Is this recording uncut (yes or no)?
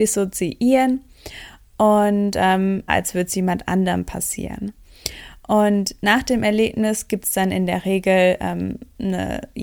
no